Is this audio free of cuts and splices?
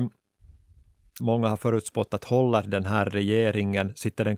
no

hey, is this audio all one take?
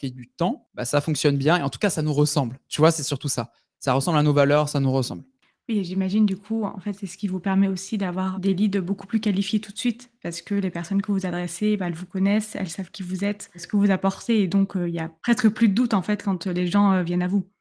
yes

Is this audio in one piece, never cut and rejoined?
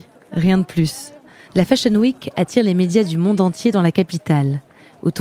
no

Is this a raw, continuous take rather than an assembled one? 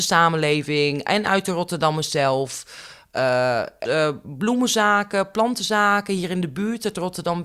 no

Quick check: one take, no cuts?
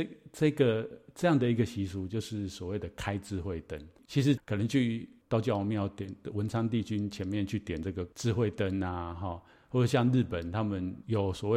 no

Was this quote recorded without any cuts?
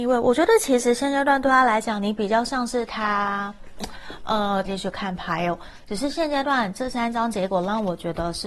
no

